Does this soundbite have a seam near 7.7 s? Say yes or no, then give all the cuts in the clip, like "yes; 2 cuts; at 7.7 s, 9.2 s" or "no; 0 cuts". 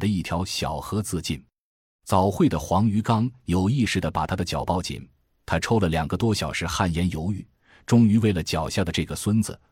no; 0 cuts